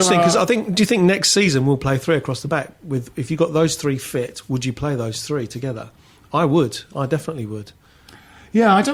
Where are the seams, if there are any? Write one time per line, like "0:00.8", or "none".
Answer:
none